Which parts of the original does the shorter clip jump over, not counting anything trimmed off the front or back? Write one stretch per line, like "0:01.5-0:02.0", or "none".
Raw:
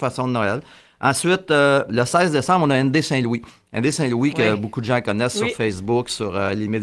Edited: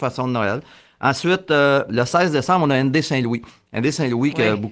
none